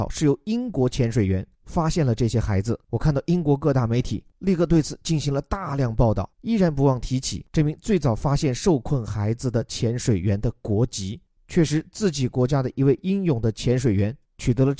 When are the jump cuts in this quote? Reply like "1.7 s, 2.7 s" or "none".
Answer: 6.3 s